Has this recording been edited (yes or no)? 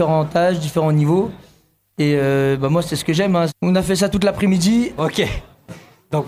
yes